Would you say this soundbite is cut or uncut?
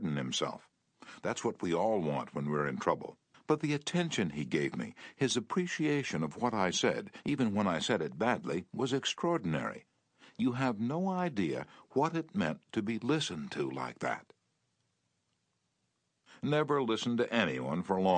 cut